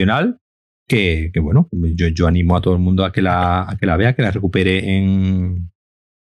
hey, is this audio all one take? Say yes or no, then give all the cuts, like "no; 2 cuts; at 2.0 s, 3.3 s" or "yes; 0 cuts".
yes; 0 cuts